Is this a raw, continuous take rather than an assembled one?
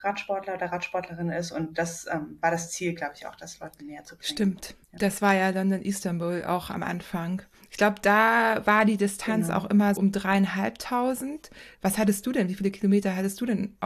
no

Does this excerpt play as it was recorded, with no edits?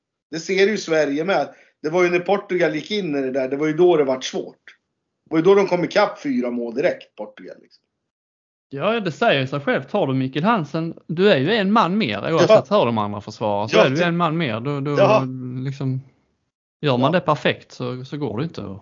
yes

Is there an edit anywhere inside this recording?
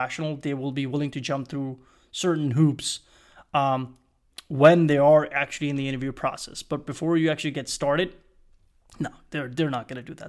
no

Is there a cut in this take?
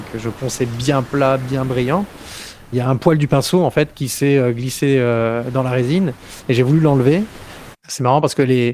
yes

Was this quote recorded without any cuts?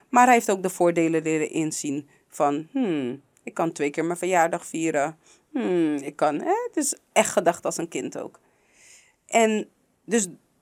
yes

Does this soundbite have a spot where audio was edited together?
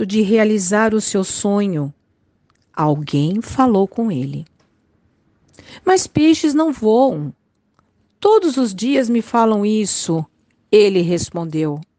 no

